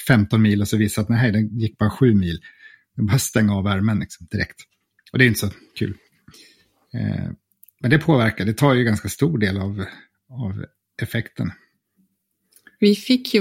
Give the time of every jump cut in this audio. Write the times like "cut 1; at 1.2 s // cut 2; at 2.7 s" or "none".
none